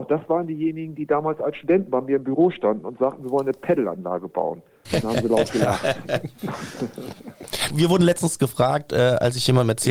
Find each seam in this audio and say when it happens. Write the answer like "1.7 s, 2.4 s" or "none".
4.9 s, 7.7 s